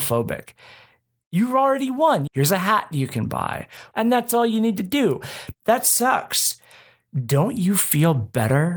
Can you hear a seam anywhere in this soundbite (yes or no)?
yes